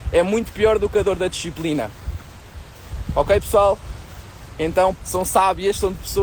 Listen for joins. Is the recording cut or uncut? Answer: cut